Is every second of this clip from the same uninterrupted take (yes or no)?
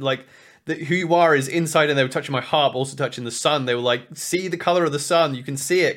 yes